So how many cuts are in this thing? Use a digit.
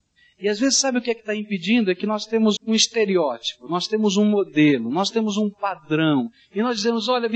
1